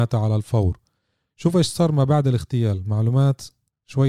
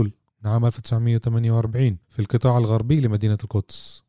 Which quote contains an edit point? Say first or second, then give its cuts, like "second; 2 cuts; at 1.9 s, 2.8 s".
second; 1 cut; at 2.0 s